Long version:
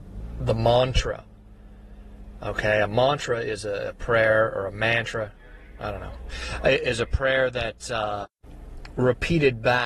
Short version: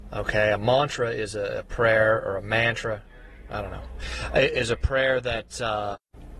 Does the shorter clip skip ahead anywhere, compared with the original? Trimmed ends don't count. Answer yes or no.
no